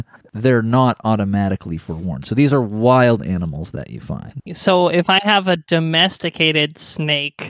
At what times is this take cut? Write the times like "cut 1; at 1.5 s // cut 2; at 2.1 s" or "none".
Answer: cut 1; at 4.5 s